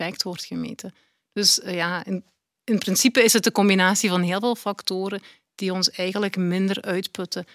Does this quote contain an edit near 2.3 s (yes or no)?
no